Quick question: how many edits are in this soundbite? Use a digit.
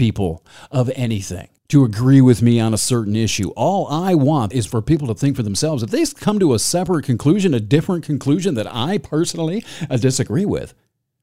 2